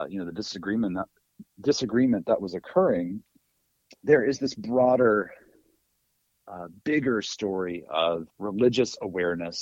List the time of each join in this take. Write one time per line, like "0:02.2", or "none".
0:08.3

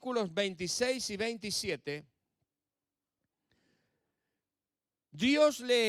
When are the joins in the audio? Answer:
none

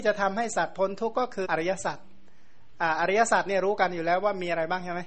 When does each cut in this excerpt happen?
0:01.4

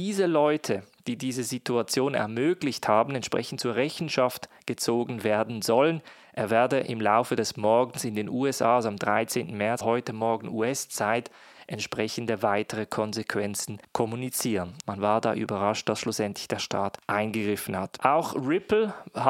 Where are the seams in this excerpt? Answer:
0:09.8
0:14.8

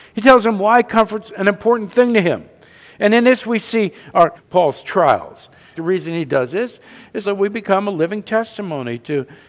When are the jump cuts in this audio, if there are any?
0:04.3
0:05.7
0:07.2

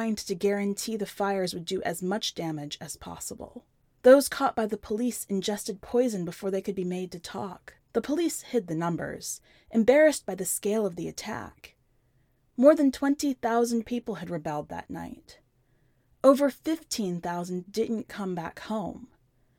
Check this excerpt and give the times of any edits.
0:03.9
0:07.8

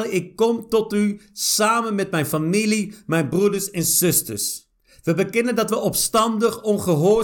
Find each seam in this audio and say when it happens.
none

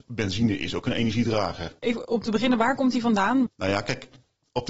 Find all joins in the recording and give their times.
0:01.8
0:03.5

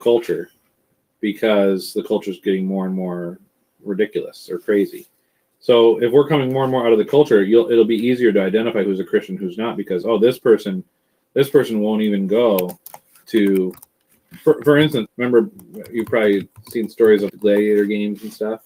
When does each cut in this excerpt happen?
0:15.1
0:17.3

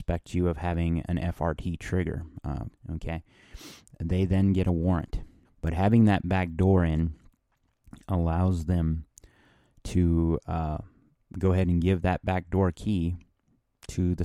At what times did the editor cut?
0:02.7
0:05.4

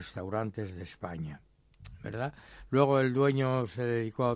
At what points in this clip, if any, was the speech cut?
none

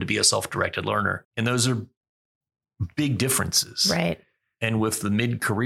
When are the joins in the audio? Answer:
0:01.2
0:04.6

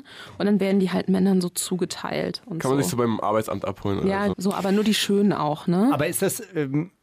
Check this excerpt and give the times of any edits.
0:04.3

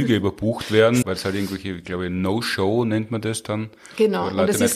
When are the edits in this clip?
0:01.0

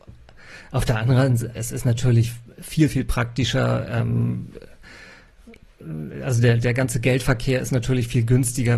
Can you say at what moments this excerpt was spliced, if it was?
0:01.5

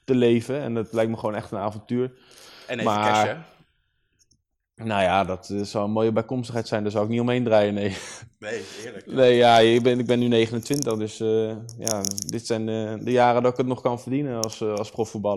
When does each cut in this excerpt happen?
none

